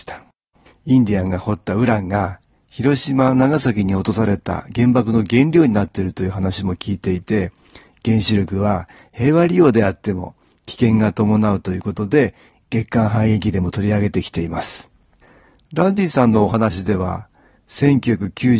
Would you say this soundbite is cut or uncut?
uncut